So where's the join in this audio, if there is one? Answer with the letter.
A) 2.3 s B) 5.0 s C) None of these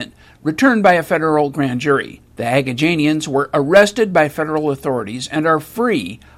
A